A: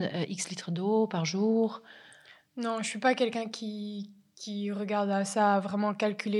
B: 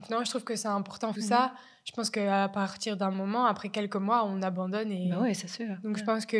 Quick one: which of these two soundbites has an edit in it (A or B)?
B